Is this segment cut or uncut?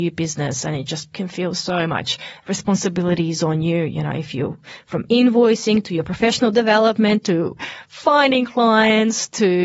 uncut